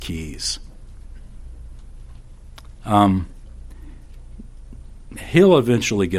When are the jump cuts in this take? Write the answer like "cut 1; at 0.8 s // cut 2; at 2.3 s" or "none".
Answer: none